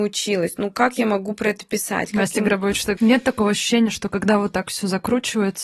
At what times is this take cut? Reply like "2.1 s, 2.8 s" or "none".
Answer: 3.0 s